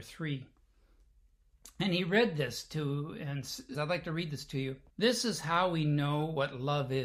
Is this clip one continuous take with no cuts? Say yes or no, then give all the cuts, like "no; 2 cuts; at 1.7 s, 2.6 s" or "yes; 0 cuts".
no; 2 cuts; at 3.7 s, 4.9 s